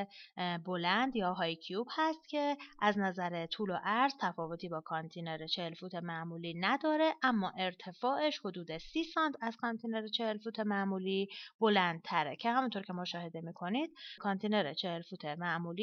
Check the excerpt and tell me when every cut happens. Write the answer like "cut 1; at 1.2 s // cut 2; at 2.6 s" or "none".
cut 1; at 14.2 s